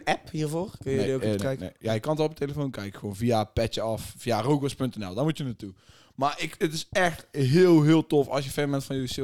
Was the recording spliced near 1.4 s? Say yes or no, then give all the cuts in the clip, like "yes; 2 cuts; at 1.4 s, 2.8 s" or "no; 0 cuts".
yes; 1 cut; at 1.4 s